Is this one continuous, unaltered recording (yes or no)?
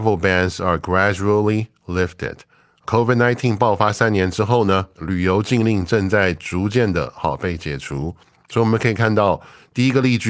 yes